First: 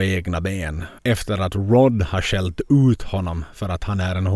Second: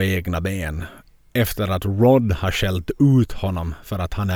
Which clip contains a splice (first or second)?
first